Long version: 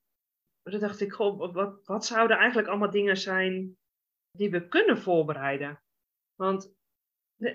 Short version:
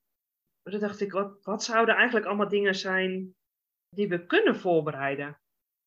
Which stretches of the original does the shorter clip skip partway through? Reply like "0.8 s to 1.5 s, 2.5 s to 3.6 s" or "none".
1.1 s to 1.5 s